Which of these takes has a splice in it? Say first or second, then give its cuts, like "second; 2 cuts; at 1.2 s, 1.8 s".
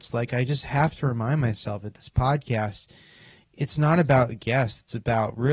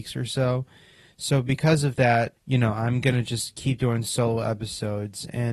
second; 1 cut; at 2.4 s